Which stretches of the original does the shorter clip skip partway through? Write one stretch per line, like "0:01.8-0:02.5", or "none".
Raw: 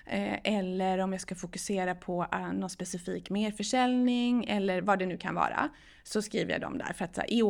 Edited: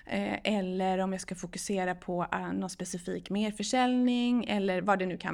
none